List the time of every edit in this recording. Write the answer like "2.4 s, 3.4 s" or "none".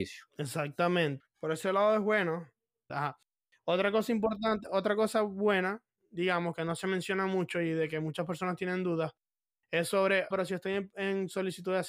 1.2 s, 2.9 s, 10.3 s